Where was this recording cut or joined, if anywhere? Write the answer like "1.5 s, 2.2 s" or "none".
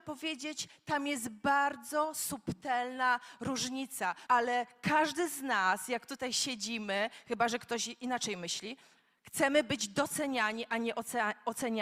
4.3 s